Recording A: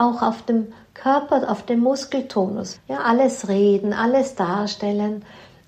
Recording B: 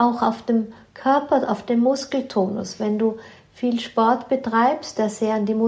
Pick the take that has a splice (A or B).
A